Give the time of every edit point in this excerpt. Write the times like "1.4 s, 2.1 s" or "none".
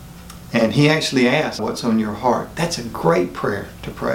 1.6 s

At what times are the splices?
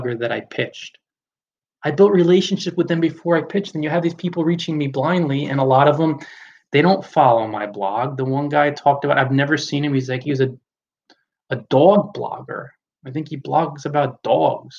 none

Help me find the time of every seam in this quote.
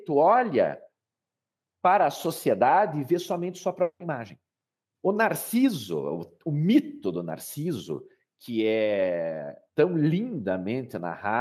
4.8 s, 9.7 s

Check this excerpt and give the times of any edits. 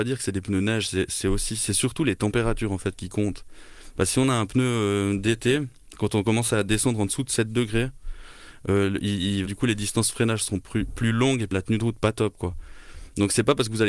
9.4 s, 11.5 s

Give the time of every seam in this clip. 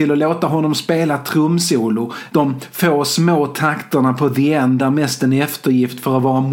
2.3 s

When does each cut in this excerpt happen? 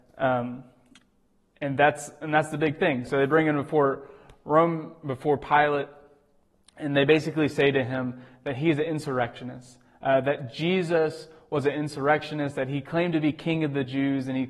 none

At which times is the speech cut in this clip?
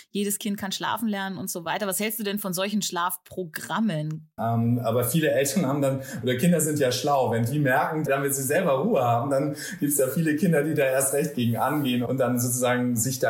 4.4 s, 8.1 s

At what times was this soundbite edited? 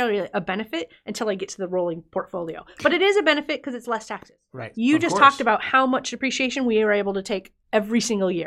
4.7 s

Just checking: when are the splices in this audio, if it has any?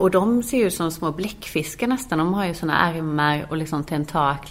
none

